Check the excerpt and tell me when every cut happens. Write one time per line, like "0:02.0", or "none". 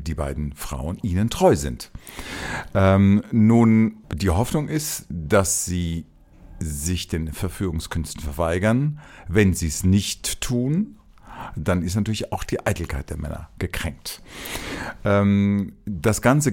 0:04.0